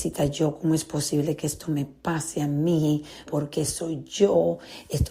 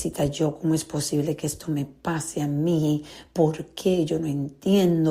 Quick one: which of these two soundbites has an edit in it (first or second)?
first